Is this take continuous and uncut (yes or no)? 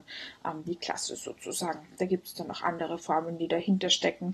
yes